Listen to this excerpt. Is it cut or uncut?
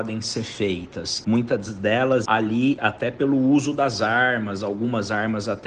cut